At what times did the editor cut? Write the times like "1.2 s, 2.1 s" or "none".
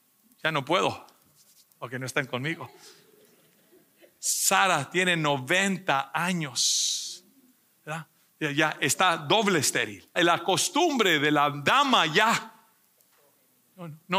10.2 s